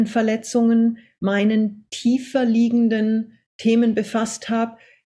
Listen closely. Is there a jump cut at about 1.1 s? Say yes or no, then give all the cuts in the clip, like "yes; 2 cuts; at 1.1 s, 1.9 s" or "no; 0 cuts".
no; 0 cuts